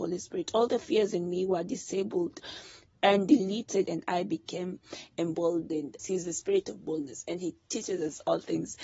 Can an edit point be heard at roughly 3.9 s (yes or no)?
yes